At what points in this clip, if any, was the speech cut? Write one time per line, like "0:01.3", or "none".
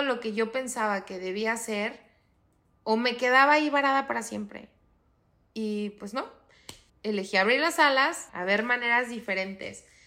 0:06.9
0:08.3